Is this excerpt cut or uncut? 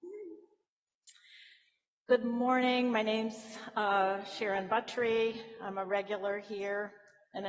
uncut